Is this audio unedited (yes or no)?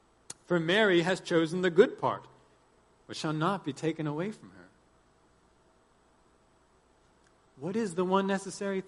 yes